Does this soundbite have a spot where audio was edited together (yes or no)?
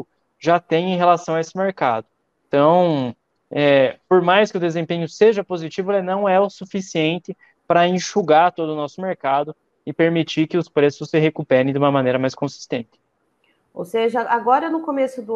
no